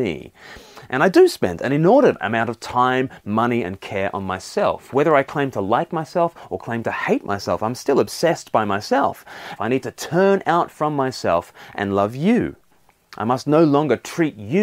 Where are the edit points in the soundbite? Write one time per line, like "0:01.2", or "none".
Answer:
0:09.6